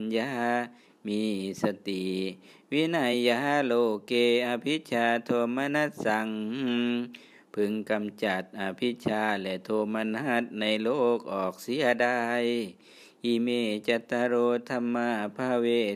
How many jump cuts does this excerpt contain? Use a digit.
0